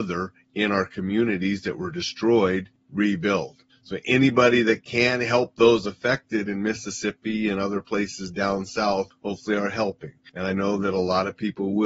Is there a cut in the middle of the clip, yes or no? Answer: no